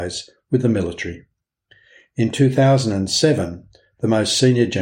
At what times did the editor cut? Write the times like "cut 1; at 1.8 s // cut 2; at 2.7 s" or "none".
none